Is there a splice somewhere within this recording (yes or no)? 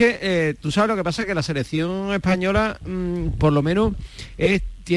no